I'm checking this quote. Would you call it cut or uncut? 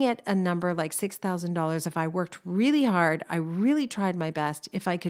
uncut